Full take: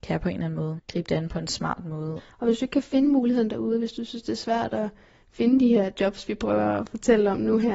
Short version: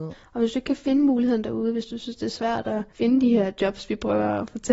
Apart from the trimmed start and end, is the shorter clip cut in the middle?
yes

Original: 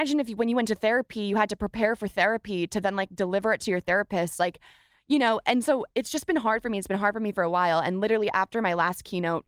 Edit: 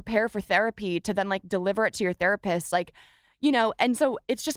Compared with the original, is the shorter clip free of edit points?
yes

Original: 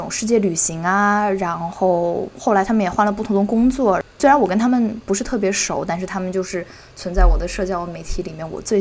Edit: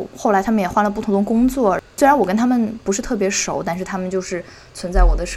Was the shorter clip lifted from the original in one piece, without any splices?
yes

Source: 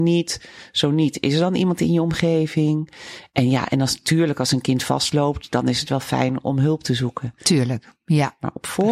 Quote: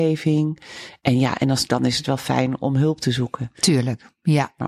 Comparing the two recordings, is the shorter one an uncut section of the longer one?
no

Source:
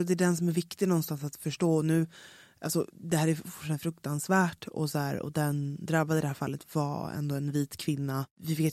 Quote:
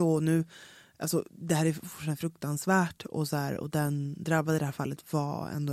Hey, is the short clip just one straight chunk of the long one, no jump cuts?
yes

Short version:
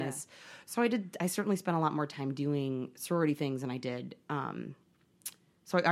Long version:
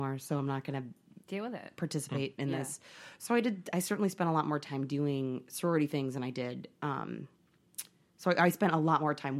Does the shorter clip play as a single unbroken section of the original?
yes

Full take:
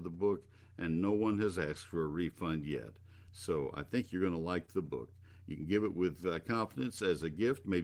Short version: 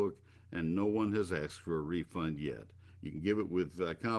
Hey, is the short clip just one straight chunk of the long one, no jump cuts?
no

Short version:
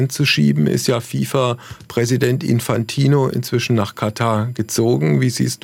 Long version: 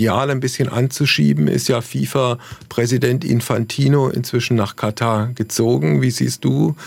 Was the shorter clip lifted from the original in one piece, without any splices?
yes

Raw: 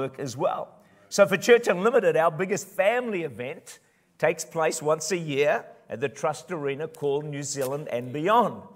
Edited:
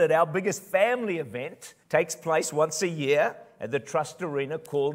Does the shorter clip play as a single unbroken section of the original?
no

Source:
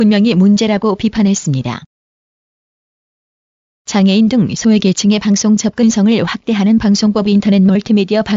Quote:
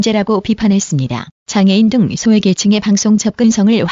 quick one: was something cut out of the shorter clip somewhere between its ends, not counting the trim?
yes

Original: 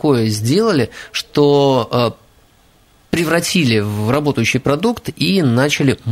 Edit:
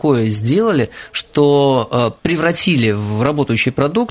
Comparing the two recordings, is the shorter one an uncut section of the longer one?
no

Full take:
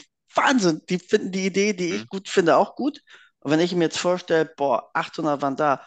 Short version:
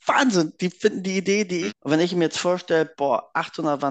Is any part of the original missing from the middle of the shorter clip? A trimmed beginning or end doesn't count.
yes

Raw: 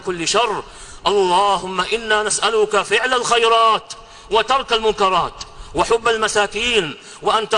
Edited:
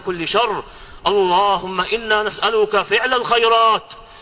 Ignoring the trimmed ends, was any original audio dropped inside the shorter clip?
no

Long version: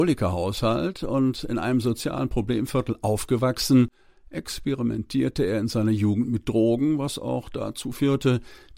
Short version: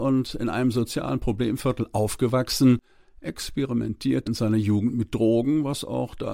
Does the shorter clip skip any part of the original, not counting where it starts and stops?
yes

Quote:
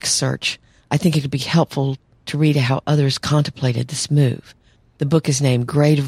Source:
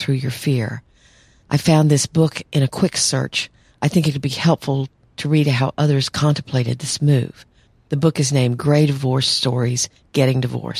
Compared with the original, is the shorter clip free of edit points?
yes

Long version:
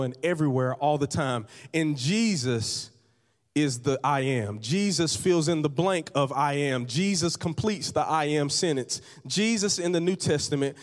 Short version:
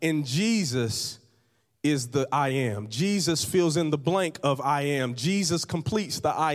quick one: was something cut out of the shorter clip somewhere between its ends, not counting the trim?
no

